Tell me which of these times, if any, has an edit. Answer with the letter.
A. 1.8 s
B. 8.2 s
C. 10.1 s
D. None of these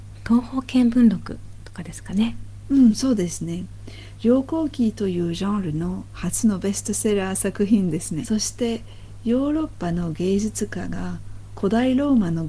B